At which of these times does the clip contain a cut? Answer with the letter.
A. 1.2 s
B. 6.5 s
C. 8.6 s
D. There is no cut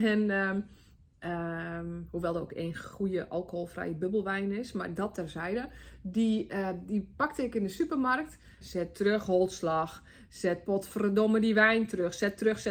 C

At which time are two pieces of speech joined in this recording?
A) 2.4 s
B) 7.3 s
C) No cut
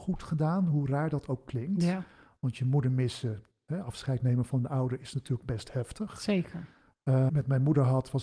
B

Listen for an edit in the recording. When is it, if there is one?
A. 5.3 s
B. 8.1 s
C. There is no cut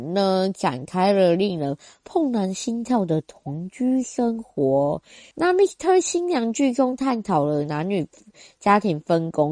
A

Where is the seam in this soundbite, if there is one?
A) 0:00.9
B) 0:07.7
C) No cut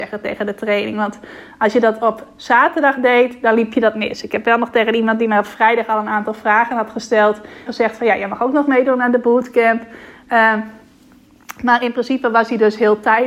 B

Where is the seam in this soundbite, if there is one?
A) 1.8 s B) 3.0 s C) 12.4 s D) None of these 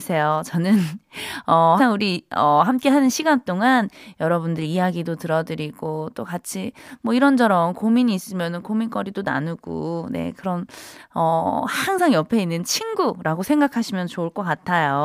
A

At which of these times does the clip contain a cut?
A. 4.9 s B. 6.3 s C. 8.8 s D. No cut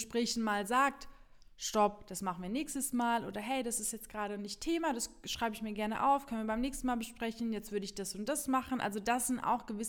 D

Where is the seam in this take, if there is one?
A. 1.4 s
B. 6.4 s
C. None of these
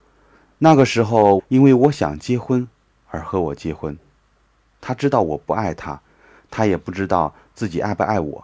A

